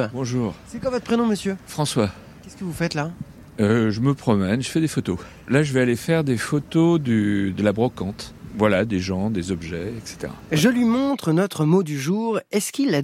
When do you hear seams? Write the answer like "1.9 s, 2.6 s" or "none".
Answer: none